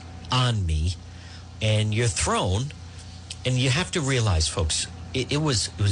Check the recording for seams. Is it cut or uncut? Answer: uncut